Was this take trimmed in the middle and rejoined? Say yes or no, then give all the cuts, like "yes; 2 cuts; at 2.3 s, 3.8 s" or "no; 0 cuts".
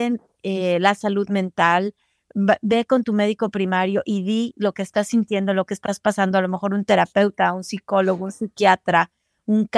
no; 0 cuts